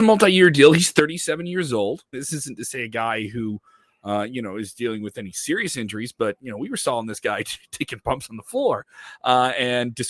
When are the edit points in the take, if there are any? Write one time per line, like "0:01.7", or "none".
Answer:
0:02.1